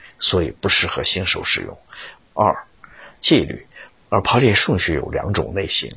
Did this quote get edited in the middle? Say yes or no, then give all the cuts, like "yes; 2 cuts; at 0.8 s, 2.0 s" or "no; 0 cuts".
yes; 2 cuts; at 2.2 s, 4.0 s